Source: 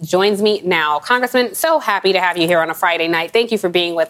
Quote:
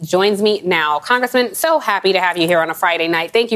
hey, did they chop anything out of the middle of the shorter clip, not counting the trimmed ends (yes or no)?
no